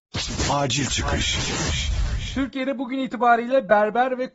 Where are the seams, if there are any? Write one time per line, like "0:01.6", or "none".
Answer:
none

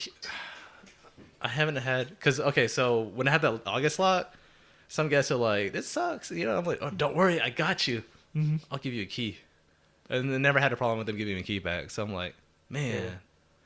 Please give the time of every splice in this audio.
none

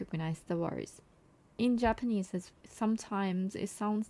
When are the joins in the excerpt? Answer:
0:02.5

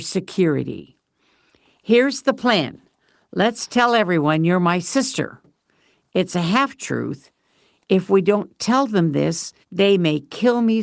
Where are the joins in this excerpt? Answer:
0:09.6

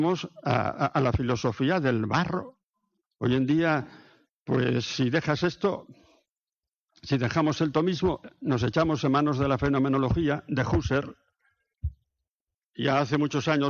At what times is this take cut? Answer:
none

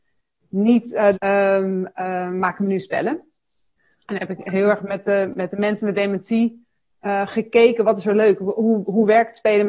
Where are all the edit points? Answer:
0:01.1

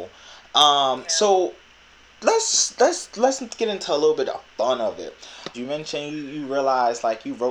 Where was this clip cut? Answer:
0:05.5

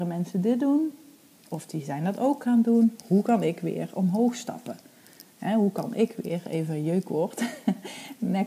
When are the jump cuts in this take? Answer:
none

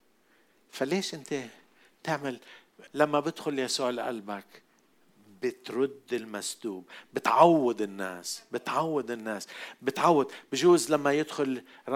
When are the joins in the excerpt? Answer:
0:02.9

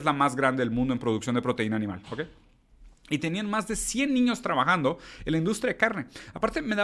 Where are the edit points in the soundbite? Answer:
none

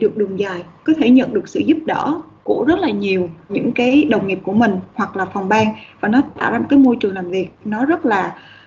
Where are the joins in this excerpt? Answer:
0:03.5

